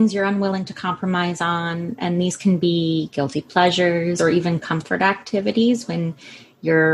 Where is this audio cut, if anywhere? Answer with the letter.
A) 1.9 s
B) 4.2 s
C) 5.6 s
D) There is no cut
B